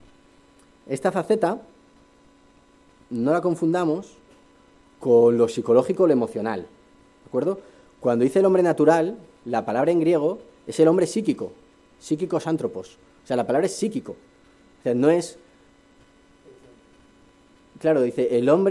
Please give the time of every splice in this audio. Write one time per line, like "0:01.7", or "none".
none